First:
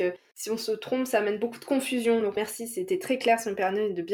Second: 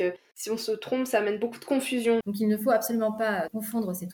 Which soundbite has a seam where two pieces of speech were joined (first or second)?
second